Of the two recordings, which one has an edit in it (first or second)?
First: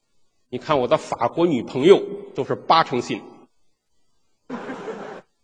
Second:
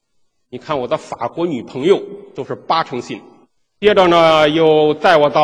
second